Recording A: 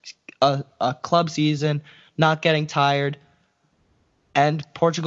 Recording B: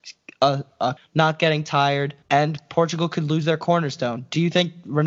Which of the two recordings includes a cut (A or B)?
B